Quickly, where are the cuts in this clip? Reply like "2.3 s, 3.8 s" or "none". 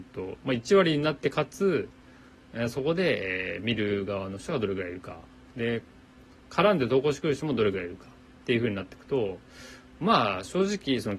none